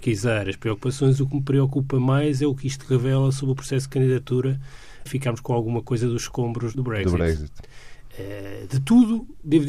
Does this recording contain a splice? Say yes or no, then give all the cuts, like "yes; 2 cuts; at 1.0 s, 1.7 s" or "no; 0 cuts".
yes; 2 cuts; at 5.1 s, 6.7 s